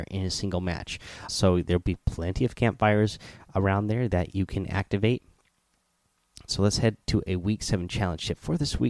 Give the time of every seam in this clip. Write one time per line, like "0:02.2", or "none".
0:01.3
0:06.5

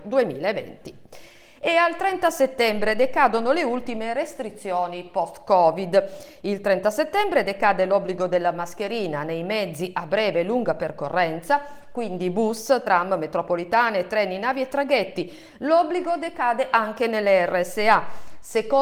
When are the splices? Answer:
none

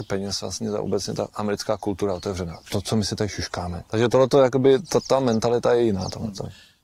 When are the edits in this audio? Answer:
0:03.9

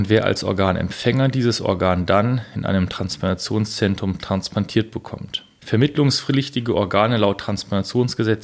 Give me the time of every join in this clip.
none

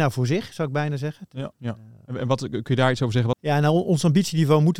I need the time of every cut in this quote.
0:01.5
0:03.3

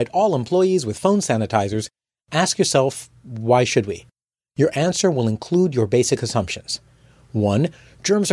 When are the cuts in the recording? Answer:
none

